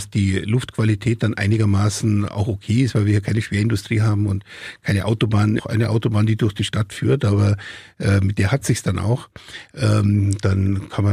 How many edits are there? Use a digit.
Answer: 1